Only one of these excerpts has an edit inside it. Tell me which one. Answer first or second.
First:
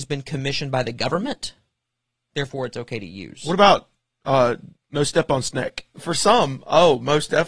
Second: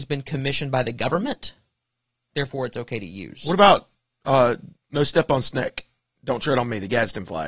first